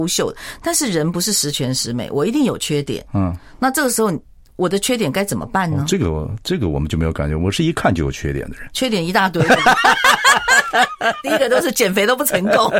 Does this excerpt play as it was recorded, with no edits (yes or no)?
yes